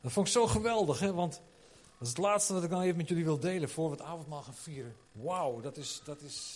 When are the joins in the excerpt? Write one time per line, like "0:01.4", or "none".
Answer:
0:05.0